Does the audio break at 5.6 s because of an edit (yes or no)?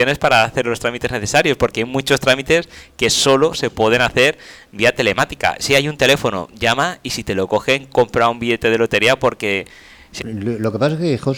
no